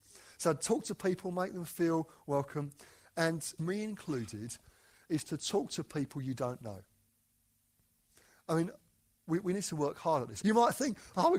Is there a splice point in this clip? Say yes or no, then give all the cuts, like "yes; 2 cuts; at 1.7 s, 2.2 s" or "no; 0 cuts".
yes; 2 cuts; at 3.6 s, 10.4 s